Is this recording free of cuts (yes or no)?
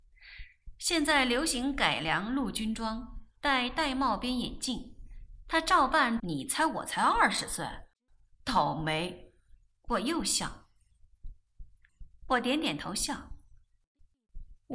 no